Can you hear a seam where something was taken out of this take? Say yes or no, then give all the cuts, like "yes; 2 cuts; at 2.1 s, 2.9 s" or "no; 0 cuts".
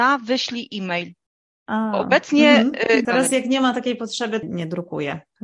yes; 2 cuts; at 3.0 s, 4.4 s